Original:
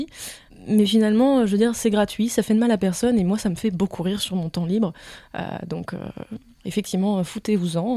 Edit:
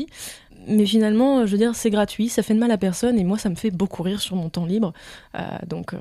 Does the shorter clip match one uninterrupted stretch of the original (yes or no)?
yes